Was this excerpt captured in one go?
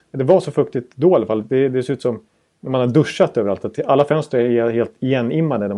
yes; 0 cuts

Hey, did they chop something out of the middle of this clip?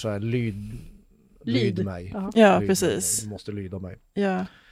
no; 0 cuts

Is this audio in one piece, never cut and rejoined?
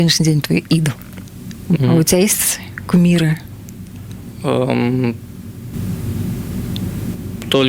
no; 1 cut; at 1.8 s

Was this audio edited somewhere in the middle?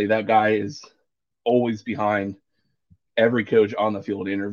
no; 0 cuts

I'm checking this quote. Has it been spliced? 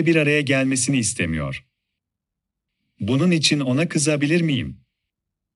no; 0 cuts

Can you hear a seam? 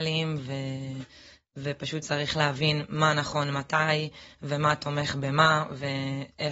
no; 0 cuts

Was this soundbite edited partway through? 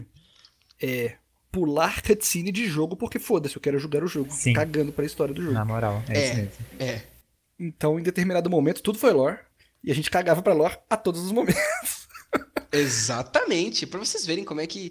no; 0 cuts

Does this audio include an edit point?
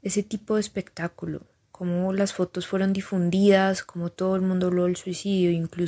no; 0 cuts

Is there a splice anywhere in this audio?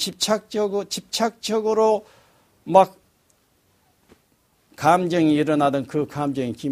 no; 0 cuts

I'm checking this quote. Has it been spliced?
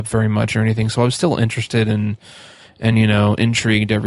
no; 0 cuts

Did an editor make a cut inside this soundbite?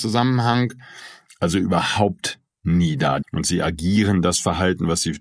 yes; 1 cut; at 3.2 s

